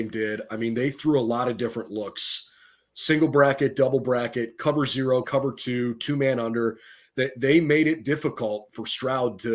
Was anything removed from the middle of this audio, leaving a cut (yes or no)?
yes